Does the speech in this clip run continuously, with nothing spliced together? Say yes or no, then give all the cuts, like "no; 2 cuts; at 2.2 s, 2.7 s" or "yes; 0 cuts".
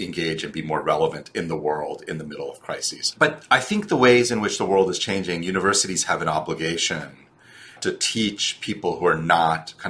no; 2 cuts; at 3.1 s, 7.8 s